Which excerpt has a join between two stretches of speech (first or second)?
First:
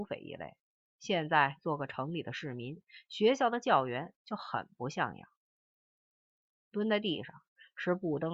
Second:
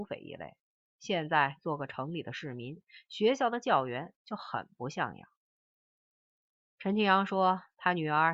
first